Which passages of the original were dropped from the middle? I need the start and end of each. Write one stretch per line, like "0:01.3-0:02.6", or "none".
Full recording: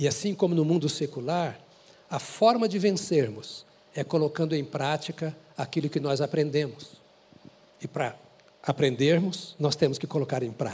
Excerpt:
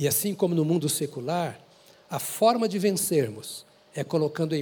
none